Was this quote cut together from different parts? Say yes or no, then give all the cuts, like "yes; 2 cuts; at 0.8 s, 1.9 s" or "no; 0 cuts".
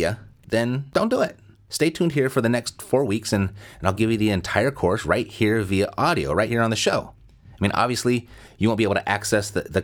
no; 0 cuts